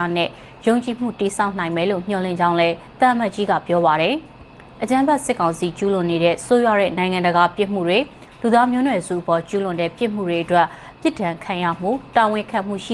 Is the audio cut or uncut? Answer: uncut